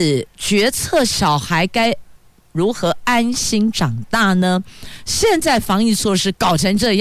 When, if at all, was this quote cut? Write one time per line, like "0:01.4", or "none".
none